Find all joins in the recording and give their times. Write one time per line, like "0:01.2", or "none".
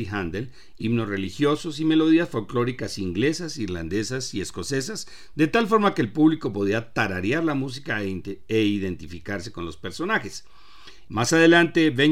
0:11.1